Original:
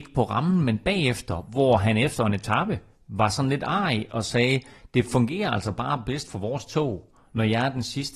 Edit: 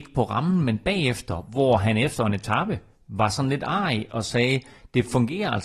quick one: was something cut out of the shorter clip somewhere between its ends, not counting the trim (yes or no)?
no